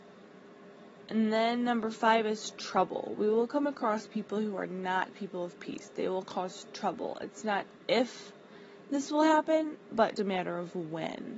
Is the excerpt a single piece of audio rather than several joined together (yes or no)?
no